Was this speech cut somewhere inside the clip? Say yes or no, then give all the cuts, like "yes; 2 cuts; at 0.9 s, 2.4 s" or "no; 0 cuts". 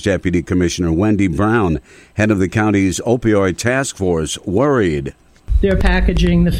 no; 0 cuts